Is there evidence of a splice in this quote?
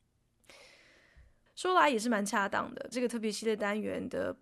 yes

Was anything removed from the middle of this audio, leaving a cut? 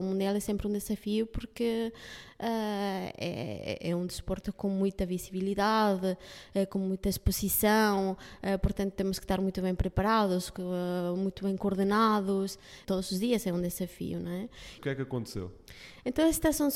yes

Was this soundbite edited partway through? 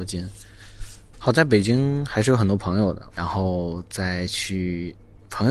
yes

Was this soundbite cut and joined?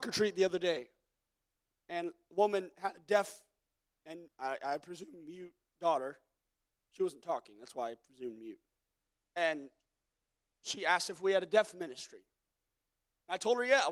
no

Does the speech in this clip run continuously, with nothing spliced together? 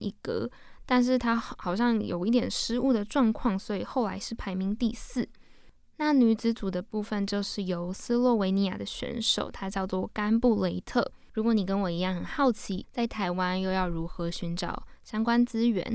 no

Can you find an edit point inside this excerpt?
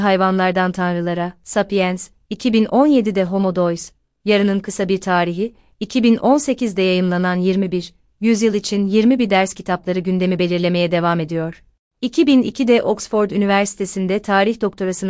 no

